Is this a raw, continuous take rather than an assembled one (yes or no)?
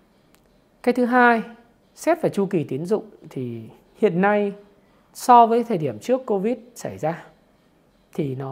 yes